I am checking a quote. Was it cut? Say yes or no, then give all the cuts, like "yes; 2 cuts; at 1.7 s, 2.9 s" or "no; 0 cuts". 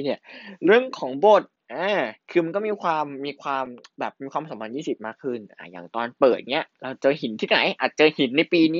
yes; 1 cut; at 2.2 s